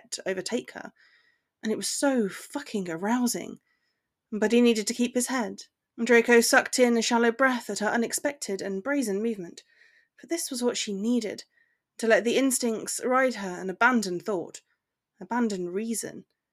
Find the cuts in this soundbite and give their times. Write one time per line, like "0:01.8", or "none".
0:05.8